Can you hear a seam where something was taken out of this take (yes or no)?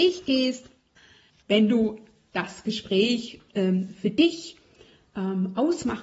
yes